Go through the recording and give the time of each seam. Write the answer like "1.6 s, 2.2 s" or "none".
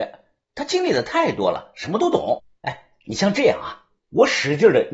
4.0 s

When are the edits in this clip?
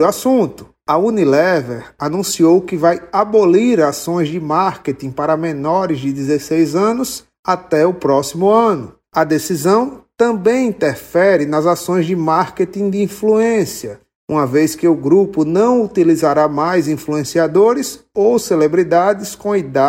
9.1 s

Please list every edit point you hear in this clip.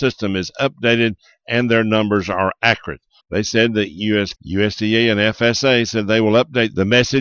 3.2 s, 4.3 s

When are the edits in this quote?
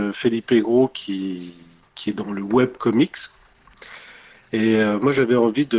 none

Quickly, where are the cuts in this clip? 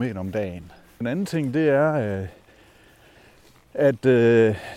1.0 s

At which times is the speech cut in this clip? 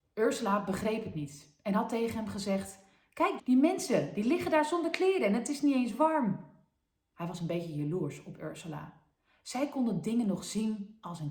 3.4 s

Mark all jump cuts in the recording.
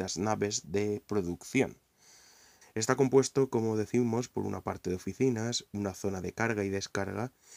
2.6 s

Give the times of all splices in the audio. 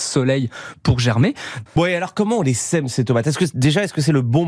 1.7 s

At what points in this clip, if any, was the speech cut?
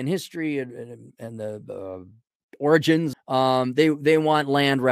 1.1 s, 3.1 s

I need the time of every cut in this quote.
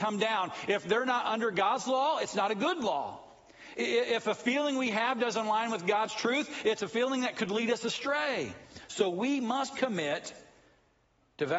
none

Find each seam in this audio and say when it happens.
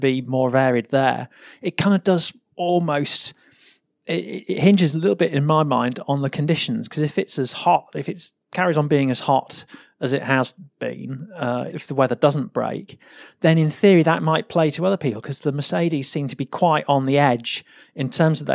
11.7 s

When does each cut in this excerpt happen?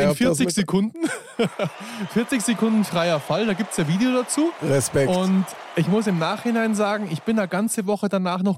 none

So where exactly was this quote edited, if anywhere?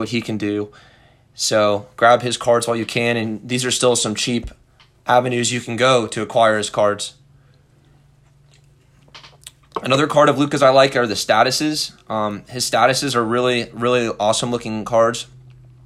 none

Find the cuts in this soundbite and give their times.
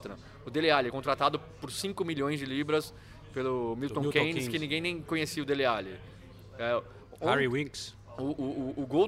none

